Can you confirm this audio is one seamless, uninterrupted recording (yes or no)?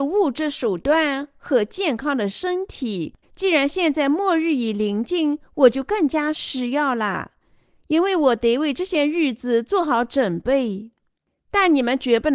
no